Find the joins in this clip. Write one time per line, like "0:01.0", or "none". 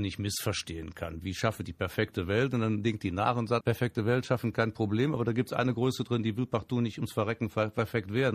0:03.6